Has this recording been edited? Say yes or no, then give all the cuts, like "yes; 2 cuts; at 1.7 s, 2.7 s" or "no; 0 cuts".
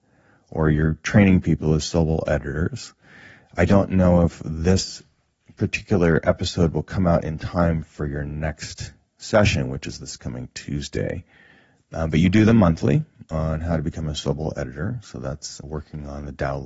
no; 0 cuts